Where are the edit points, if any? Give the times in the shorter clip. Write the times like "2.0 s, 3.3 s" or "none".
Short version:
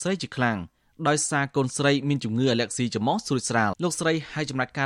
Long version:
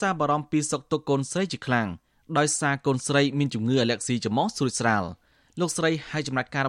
3.7 s